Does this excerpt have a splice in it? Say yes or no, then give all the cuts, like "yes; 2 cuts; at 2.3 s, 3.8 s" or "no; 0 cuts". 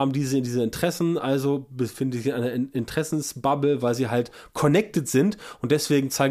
no; 0 cuts